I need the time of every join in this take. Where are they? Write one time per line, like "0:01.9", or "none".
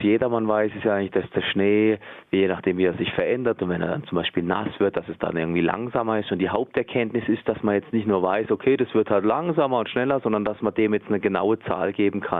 none

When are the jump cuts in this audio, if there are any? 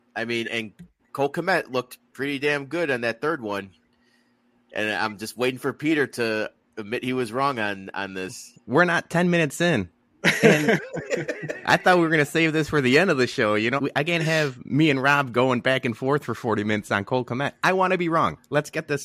0:13.8

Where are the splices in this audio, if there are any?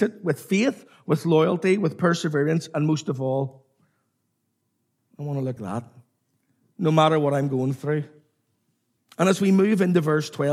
0:05.6
0:09.0

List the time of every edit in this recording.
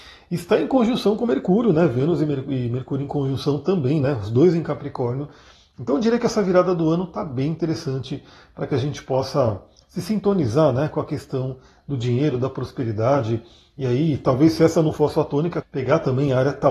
0:15.6

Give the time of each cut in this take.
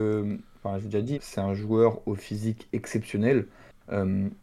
0:01.1

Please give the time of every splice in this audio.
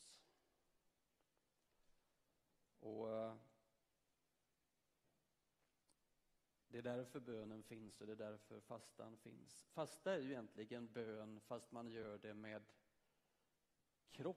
none

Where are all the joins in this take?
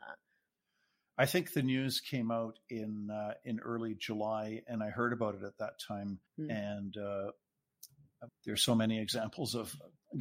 0:06.3
0:08.3

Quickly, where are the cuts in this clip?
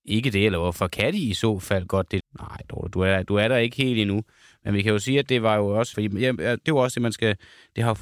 0:02.2
0:05.9

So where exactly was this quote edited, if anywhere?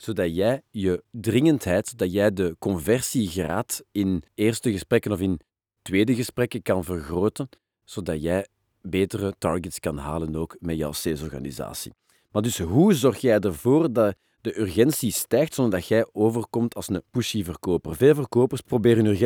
none

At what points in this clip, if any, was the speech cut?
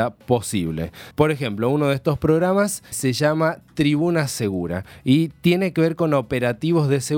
0:01.1
0:02.9

